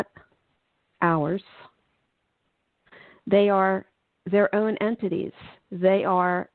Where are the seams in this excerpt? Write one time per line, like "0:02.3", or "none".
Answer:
none

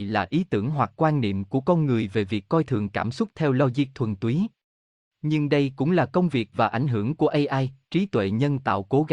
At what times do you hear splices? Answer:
none

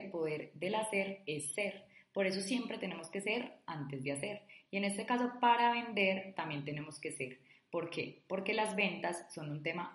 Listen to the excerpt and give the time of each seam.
none

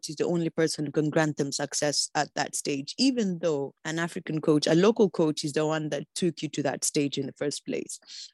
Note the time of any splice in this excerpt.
0:03.8

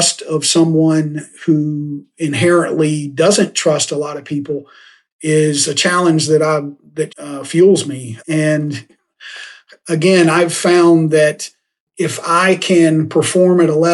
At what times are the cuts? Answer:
0:07.1
0:08.2

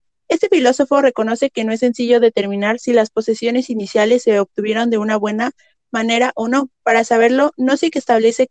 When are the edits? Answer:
none

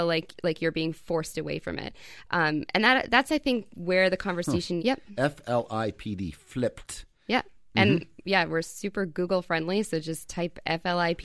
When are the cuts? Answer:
0:04.8

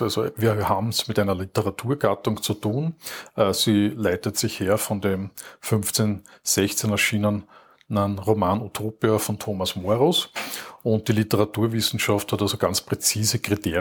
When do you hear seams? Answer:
none

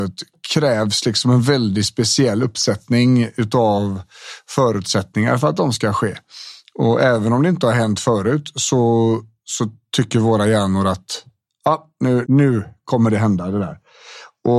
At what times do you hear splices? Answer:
0:12.2

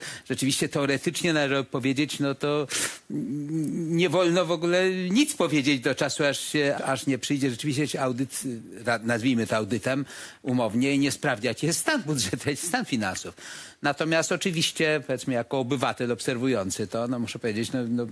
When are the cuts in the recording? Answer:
0:06.8

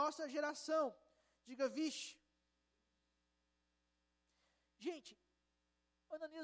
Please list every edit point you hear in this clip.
none

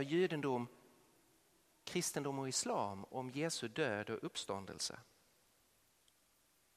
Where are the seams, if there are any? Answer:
none

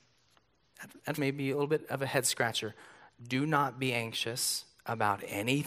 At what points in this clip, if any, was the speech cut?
0:01.1

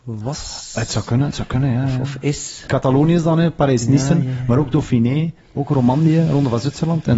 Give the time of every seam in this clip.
0:02.7

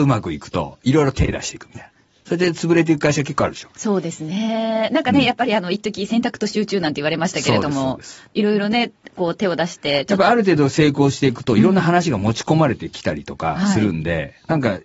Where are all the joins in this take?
none

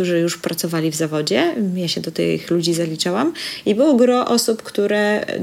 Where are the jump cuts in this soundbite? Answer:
none

